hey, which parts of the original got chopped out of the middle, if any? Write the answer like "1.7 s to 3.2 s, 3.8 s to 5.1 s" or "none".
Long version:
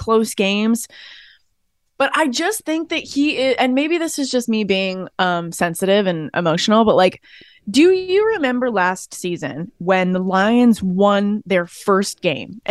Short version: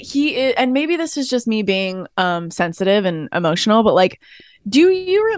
none